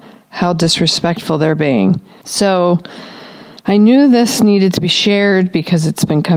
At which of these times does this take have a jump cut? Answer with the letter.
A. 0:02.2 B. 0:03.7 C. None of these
A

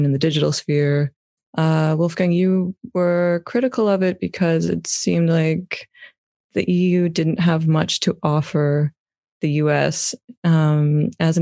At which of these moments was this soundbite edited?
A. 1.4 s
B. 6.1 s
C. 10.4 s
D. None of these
A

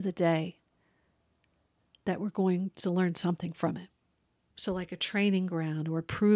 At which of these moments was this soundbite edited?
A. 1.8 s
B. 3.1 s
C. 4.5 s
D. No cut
C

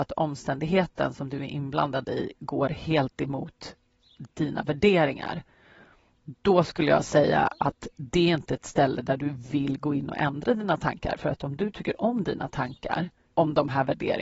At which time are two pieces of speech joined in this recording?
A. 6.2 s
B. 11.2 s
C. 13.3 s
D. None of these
C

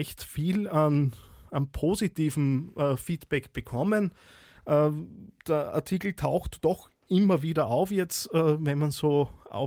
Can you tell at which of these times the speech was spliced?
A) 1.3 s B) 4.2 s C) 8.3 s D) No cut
D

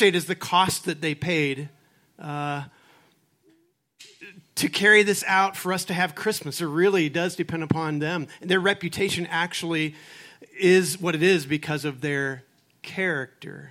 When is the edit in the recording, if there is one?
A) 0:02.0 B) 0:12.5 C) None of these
C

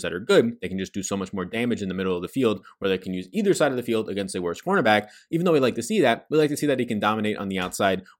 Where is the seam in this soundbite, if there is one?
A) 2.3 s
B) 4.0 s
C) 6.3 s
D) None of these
D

